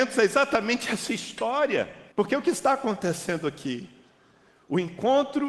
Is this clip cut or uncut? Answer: cut